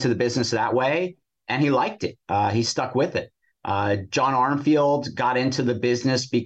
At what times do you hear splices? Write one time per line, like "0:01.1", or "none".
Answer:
none